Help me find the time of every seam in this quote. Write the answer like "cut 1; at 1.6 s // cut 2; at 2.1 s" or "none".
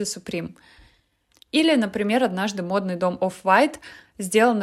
cut 1; at 1.3 s